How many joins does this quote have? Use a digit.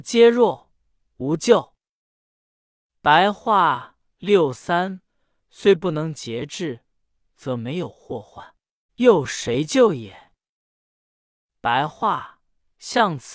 2